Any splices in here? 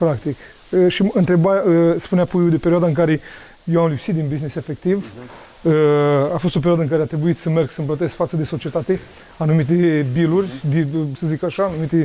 yes; 1 cut; at 11.2 s

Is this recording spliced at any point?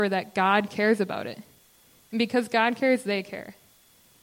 no; 0 cuts

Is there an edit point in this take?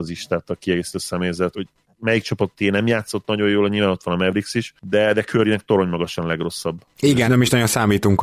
yes; 2 cuts; at 1.5 s, 7.3 s

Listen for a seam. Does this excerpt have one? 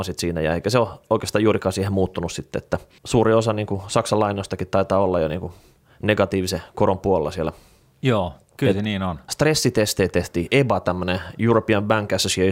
yes; 1 cut; at 9.3 s

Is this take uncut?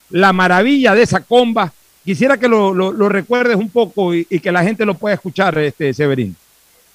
no; 1 cut; at 1.9 s

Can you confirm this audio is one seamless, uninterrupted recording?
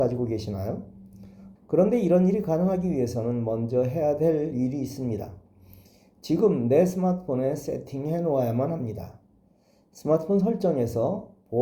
no; 1 cut; at 1.6 s

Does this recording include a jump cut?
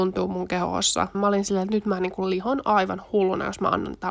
yes; 1 cut; at 1.1 s

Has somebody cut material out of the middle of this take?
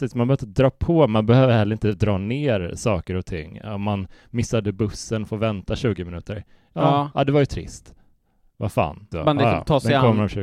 yes; 1 cut; at 9.1 s

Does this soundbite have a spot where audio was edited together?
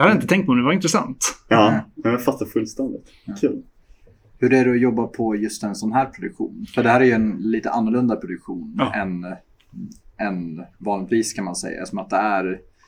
no; 0 cuts

